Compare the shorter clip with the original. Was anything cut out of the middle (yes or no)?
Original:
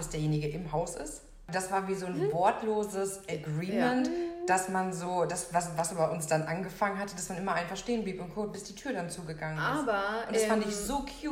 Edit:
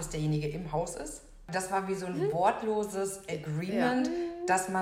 no